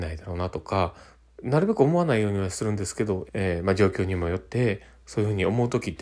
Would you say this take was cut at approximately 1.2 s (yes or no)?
yes